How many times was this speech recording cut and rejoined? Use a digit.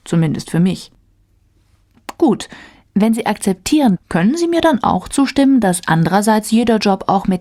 1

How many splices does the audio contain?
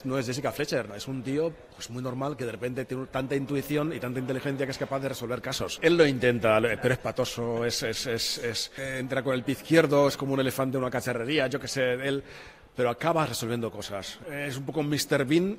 0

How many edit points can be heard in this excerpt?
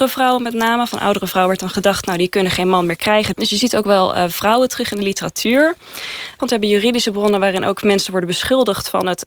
2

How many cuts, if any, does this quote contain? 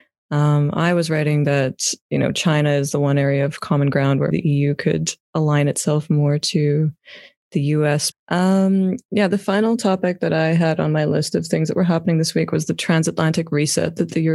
2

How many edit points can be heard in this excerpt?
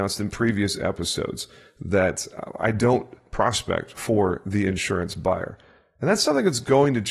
0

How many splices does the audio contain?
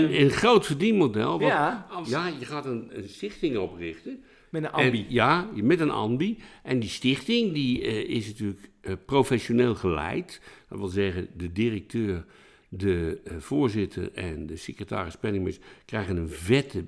1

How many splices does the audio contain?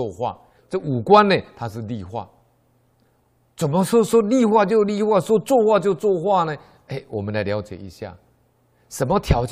0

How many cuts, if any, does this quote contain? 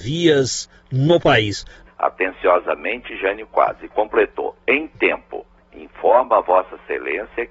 1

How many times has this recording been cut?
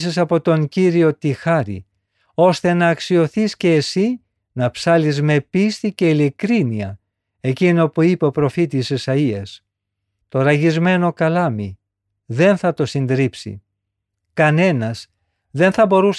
2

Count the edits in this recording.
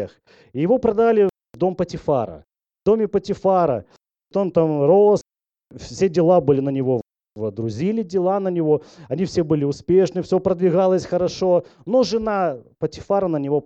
0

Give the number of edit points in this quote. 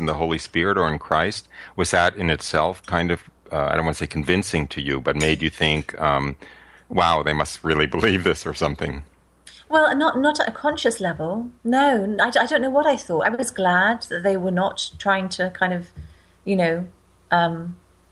0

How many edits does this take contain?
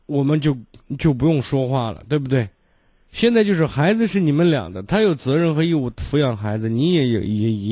0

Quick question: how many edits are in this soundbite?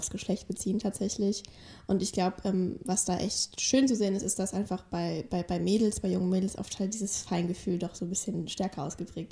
0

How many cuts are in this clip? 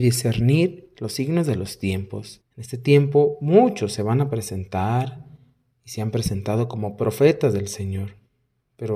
1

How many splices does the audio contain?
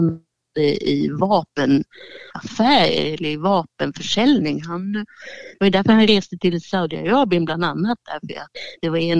0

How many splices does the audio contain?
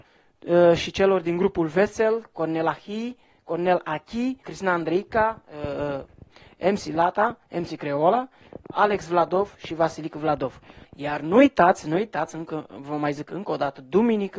2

